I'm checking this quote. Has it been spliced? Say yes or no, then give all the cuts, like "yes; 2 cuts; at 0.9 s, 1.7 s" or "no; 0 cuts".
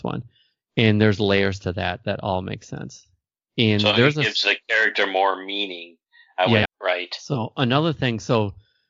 yes; 1 cut; at 6.7 s